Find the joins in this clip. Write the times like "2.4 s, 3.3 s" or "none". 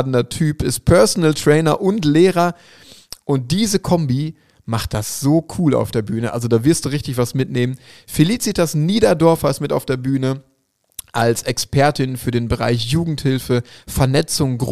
none